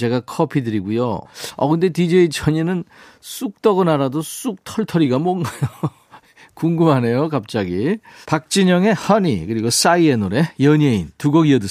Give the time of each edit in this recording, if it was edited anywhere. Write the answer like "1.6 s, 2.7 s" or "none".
1.2 s, 8.2 s

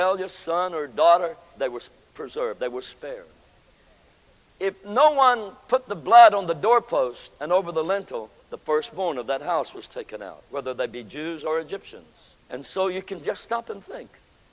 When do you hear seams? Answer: 1.5 s, 12.4 s

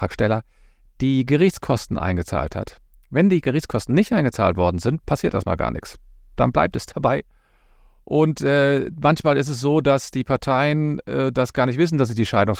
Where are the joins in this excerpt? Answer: none

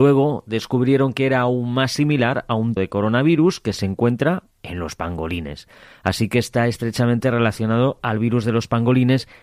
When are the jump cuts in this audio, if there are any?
2.8 s

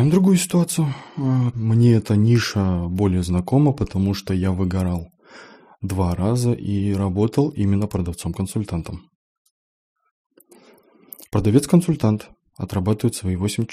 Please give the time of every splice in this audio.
1.5 s

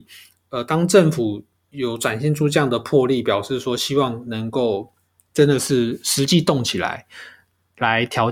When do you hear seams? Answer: none

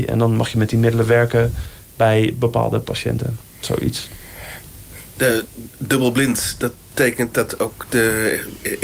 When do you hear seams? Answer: 5.1 s

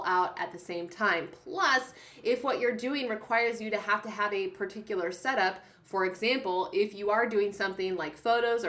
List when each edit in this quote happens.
none

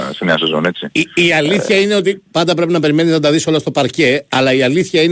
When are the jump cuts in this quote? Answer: none

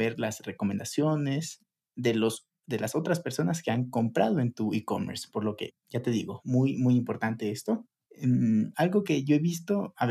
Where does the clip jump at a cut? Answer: 8.1 s

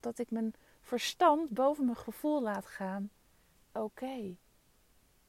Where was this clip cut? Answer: 3.7 s

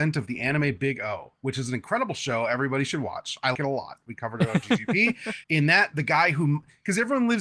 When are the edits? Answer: 3.5 s, 5.4 s

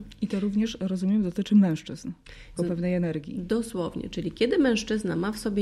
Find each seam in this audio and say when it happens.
2.6 s

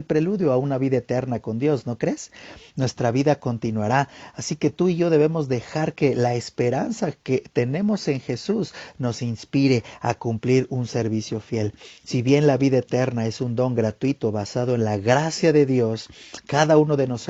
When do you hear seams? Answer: none

